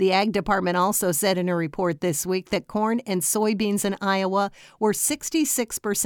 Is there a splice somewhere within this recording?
no; 0 cuts

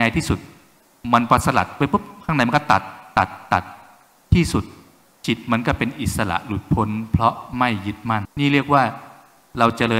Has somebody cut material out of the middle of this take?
yes; 1 cut; at 8.2 s

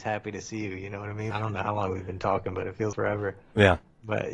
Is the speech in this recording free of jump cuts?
no; 2 cuts; at 1.3 s, 2.9 s

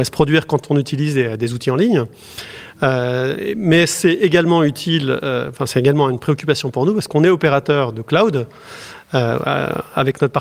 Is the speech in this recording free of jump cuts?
yes; 0 cuts

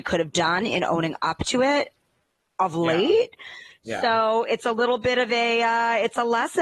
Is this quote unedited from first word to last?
yes; 0 cuts

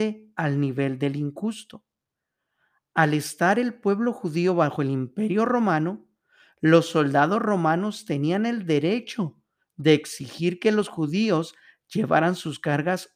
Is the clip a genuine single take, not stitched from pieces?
yes; 0 cuts

